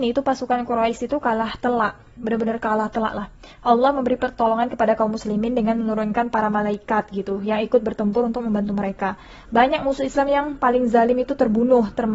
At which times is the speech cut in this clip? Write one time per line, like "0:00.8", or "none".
none